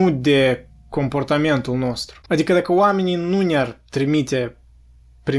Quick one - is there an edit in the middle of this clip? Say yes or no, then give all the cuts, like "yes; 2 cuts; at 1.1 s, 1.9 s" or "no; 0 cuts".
yes; 1 cut; at 2.2 s